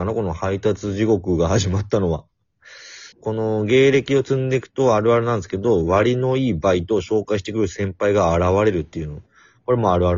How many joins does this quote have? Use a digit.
1